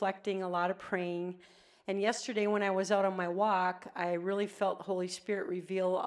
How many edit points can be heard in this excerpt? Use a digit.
0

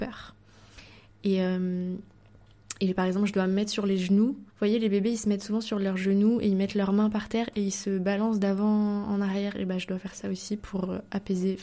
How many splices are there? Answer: 2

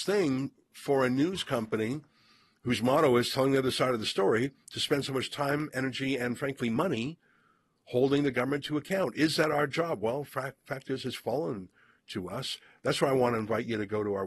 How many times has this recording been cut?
0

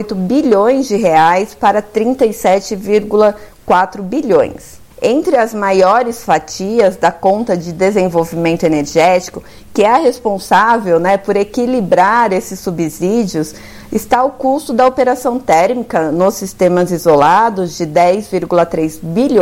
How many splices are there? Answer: 1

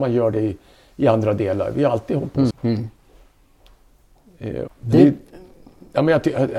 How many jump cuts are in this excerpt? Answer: 2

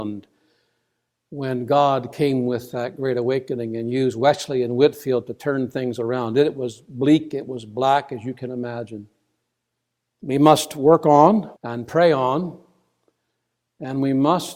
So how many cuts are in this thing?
2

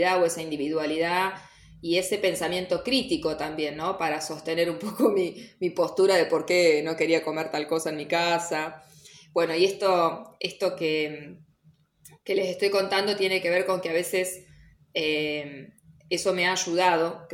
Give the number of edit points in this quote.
0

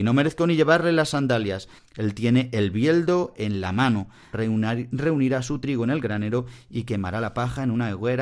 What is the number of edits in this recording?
2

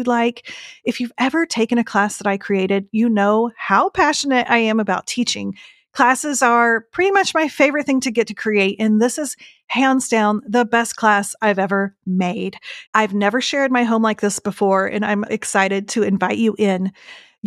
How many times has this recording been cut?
2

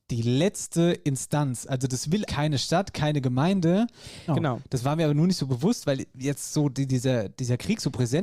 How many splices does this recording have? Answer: 2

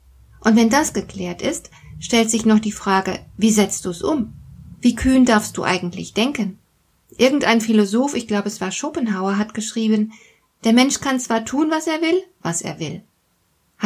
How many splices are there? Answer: 3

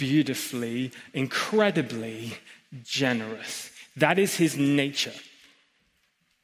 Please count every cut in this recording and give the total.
0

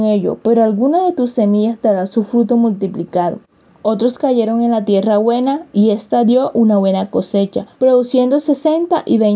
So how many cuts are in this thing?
2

